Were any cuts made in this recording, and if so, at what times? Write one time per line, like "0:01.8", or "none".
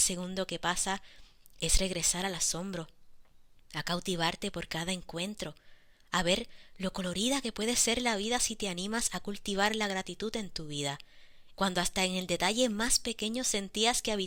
0:11.5